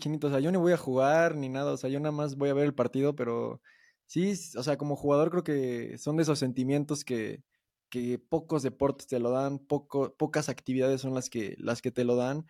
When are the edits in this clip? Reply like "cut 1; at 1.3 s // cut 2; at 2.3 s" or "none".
none